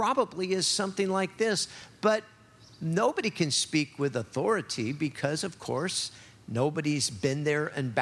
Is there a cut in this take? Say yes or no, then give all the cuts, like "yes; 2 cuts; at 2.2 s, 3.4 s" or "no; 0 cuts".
no; 0 cuts